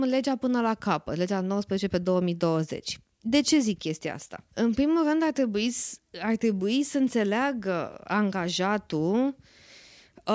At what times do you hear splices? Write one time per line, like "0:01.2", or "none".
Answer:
0:04.5